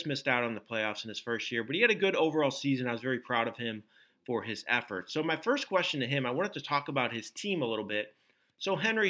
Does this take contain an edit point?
no; 0 cuts

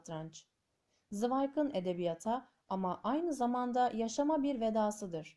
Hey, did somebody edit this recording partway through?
no; 0 cuts

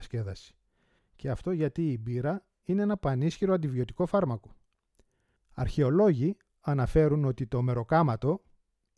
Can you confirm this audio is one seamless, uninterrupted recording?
no; 2 cuts; at 1.0 s, 5.4 s

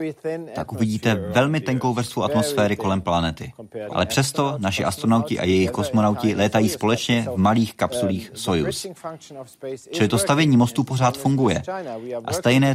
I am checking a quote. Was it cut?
yes; 1 cut; at 3.9 s

